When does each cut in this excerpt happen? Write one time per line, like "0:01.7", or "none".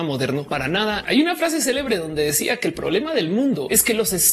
0:01.0